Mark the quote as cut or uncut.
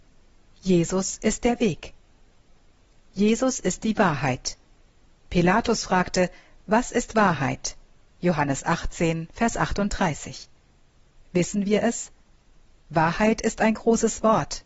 uncut